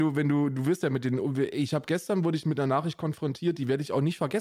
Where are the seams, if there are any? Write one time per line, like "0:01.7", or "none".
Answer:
none

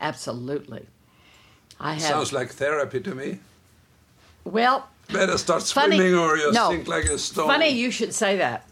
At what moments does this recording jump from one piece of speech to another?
none

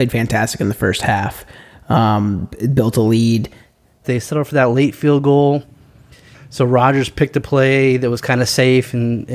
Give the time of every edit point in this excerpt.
0:04.0
0:06.3

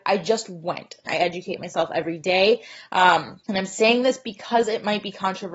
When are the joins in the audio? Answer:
0:01.1
0:03.4

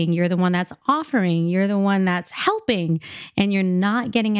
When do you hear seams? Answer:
none

